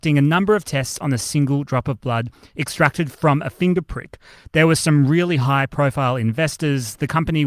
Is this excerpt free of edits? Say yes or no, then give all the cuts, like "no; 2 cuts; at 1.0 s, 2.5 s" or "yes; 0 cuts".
yes; 0 cuts